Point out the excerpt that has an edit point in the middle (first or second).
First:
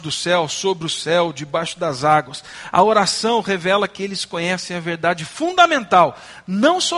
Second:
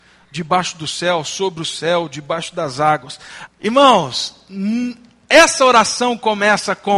second